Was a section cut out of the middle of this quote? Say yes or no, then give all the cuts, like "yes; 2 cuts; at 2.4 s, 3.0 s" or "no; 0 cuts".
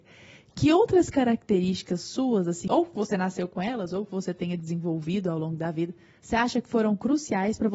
yes; 1 cut; at 2.7 s